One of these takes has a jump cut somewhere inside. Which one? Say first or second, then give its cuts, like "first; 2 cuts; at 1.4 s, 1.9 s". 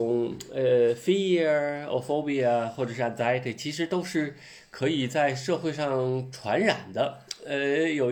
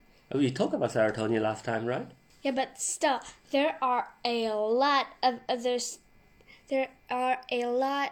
second; 1 cut; at 2.3 s